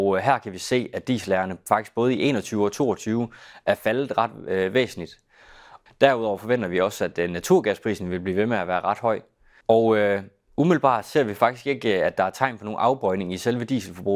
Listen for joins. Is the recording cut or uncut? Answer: cut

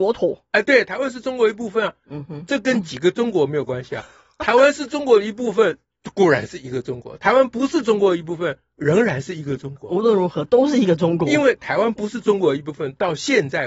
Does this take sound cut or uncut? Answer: cut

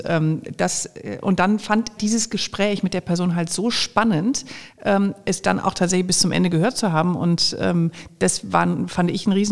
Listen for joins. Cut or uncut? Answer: cut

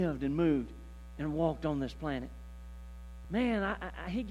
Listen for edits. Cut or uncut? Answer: uncut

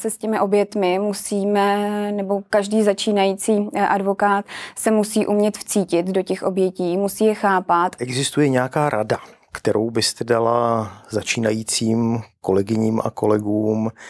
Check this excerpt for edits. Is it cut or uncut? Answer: cut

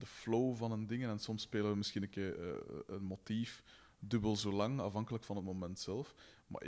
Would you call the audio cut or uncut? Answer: uncut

